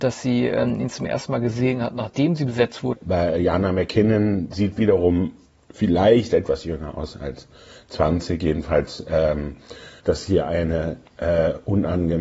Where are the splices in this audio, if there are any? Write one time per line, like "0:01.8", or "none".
0:02.9
0:10.0